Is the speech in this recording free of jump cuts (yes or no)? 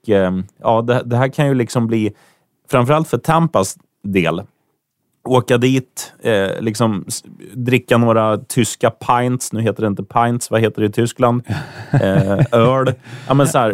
yes